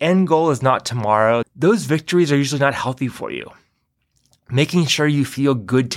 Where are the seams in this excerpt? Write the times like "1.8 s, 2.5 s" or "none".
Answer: 1.4 s